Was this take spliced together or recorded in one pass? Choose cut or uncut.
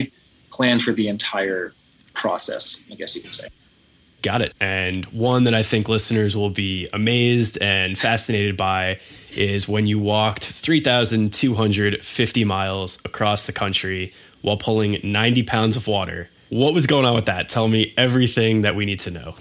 cut